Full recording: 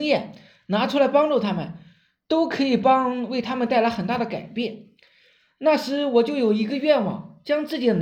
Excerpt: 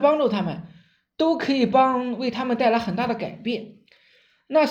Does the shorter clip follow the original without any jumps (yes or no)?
yes